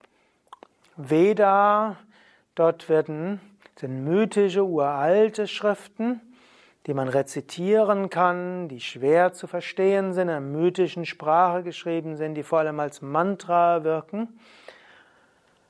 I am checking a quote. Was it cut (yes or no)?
no